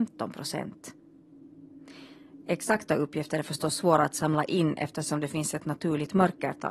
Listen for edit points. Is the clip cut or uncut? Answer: uncut